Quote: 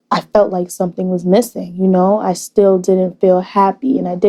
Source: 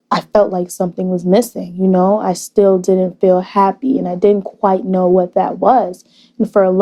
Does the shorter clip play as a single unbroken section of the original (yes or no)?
yes